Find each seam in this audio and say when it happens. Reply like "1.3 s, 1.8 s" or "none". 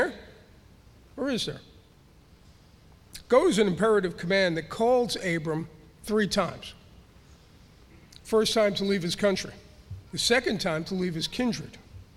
10.1 s